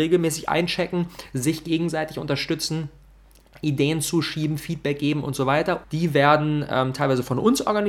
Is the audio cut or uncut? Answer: cut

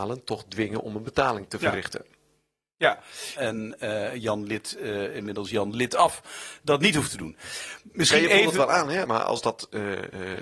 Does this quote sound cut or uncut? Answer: cut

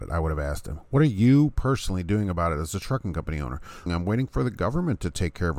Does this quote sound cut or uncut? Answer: cut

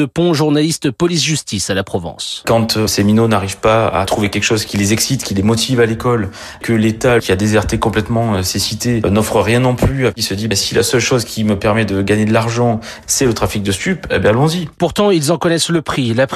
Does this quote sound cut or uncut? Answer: uncut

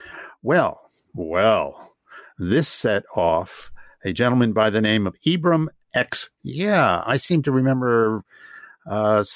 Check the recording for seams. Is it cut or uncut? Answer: cut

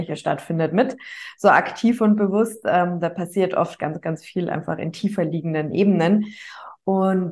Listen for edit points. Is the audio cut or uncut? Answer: uncut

